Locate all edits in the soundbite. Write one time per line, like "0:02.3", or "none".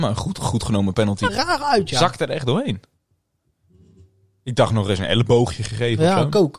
0:01.3